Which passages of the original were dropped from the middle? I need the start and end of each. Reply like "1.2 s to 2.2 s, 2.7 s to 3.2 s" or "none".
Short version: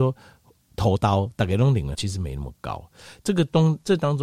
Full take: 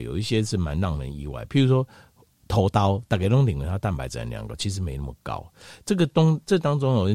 3.7 s to 4.6 s